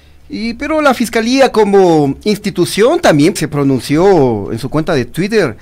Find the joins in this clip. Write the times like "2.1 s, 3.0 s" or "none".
3.4 s

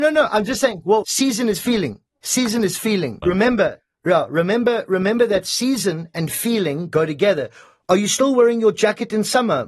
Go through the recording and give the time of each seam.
1.0 s, 3.2 s

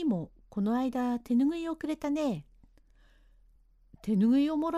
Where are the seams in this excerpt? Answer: none

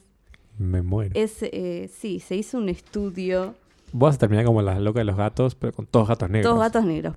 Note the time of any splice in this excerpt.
none

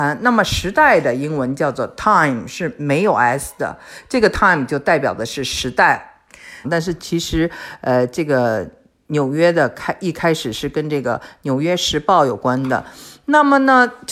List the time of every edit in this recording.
6.6 s

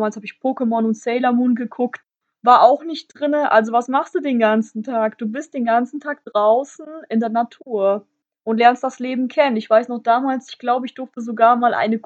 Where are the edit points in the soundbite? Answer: none

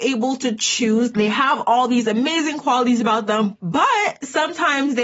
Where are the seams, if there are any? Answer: 1.1 s, 3.6 s

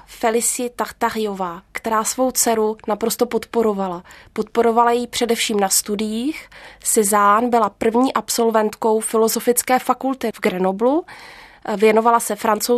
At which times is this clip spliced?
none

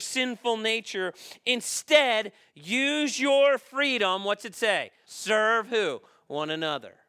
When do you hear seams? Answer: 5.0 s

